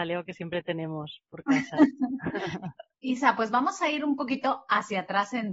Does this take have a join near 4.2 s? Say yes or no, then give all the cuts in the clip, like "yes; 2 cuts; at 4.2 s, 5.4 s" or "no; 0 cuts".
no; 1 cut; at 2.9 s